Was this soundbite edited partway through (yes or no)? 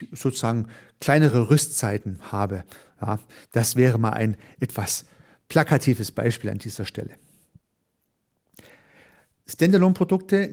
no